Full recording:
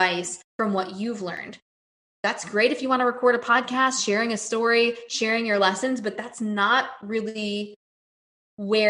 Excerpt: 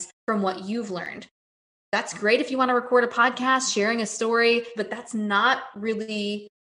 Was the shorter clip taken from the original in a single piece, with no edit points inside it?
no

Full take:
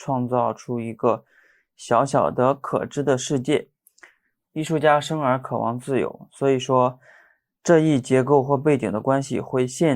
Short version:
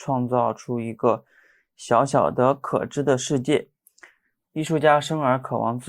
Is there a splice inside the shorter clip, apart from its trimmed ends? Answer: no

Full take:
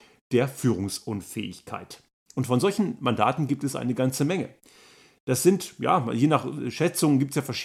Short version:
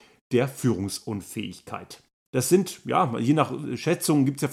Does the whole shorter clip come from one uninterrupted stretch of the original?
no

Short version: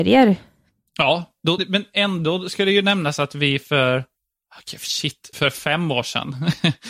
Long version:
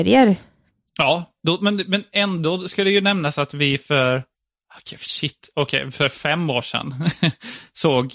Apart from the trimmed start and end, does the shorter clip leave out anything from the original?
yes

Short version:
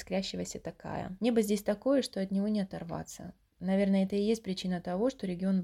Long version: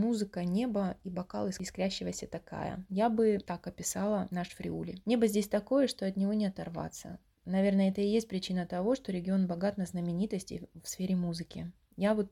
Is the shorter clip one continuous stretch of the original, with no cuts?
no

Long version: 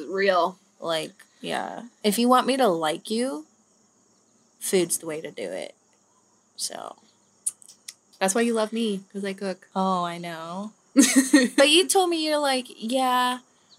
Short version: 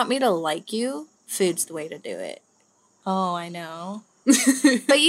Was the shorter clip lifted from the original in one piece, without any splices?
no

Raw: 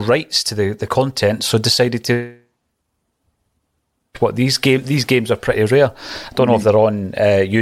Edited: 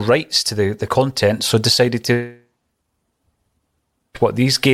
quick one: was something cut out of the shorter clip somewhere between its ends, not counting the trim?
no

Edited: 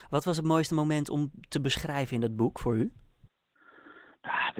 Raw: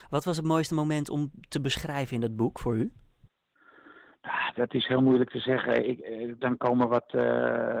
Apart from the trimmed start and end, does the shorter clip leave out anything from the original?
no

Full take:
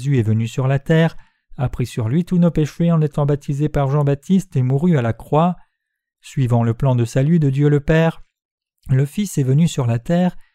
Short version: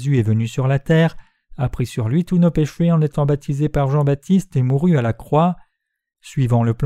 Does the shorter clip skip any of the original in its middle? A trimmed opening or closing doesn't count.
no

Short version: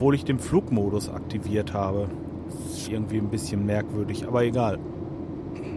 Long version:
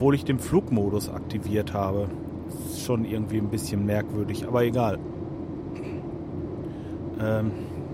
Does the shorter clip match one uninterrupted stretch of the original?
no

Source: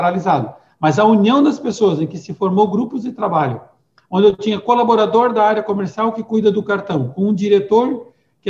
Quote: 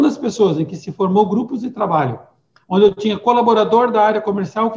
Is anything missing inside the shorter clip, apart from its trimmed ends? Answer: no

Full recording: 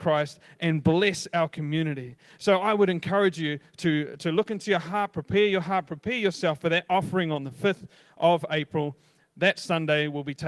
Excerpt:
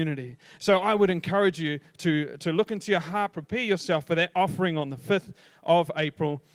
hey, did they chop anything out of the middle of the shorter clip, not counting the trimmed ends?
yes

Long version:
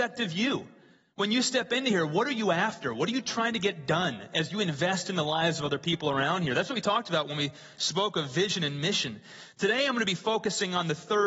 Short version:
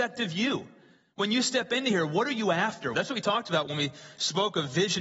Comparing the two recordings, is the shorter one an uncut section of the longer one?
no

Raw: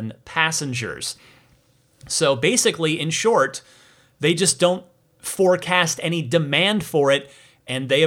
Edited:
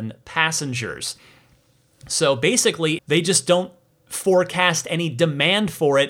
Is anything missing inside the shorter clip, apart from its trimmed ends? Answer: yes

